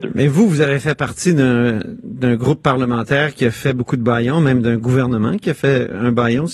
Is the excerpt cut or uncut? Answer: uncut